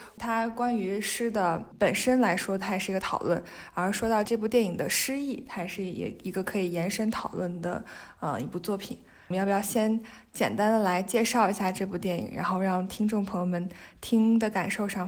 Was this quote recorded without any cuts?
yes; 0 cuts

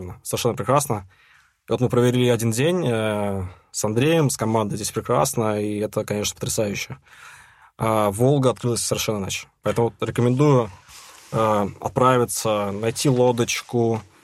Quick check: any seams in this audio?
no; 0 cuts

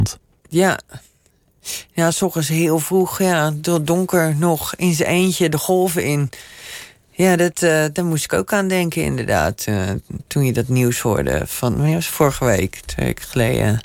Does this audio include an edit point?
no; 0 cuts

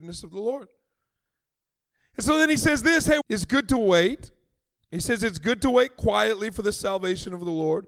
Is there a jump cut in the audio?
yes; 2 cuts; at 3.2 s, 4.8 s

